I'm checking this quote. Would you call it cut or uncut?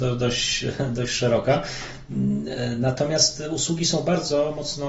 uncut